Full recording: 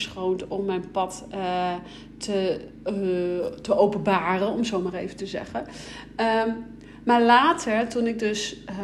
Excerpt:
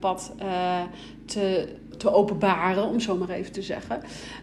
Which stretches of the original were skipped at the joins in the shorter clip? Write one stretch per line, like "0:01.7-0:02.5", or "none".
0:02.8-0:03.6